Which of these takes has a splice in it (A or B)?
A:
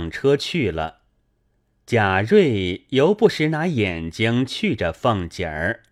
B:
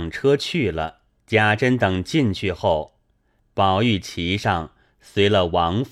B